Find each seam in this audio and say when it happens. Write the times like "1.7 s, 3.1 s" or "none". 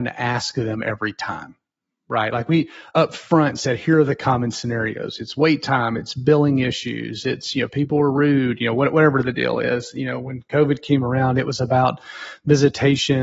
none

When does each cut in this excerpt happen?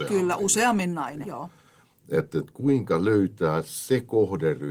1.2 s

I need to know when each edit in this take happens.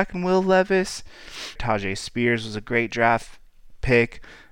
1.6 s

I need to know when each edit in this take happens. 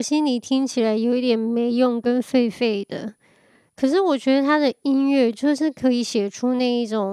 none

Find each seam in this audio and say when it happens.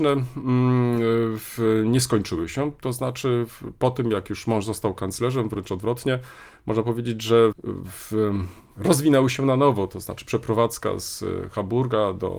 7.5 s

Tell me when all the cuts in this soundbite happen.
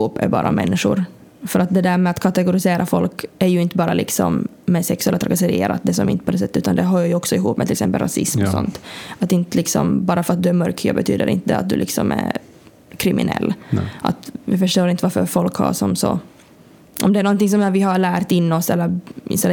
none

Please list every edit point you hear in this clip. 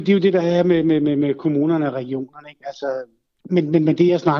3.4 s

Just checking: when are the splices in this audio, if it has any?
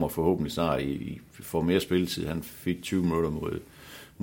none

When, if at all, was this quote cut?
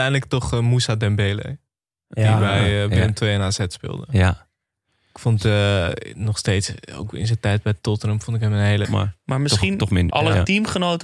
8.8 s, 10.1 s

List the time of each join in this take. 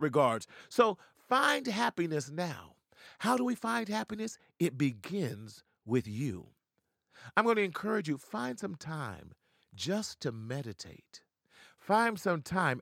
none

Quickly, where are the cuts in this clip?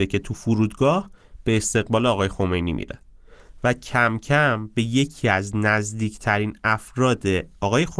none

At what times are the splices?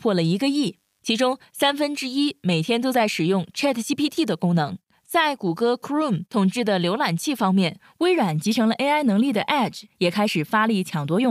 none

